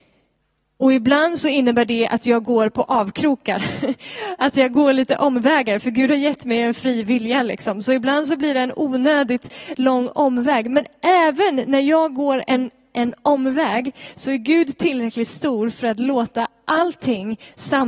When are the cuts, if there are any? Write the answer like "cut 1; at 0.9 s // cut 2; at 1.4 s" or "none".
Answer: none